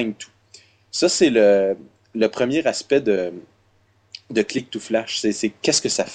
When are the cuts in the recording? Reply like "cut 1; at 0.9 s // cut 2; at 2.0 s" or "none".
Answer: none